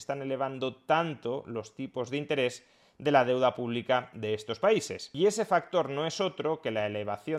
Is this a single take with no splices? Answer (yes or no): yes